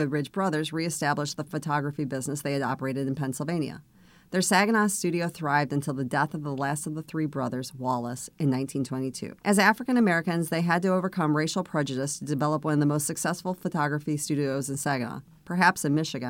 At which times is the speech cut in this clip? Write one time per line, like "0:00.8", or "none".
0:09.4